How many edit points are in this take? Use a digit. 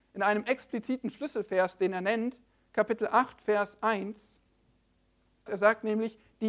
1